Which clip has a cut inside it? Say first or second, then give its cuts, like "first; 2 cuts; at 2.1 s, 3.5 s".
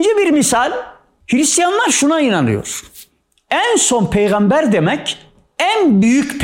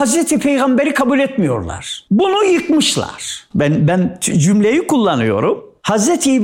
second; 2 cuts; at 2.1 s, 3.5 s